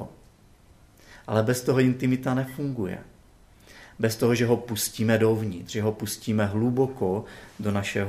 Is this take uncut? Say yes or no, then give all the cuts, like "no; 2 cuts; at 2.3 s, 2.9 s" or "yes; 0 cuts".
yes; 0 cuts